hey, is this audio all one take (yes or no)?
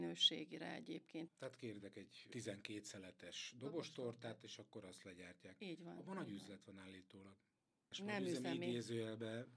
no